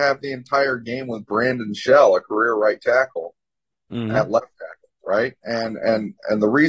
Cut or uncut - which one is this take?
uncut